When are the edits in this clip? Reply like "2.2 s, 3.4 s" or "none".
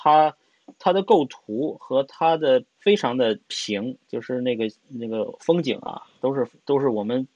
2.7 s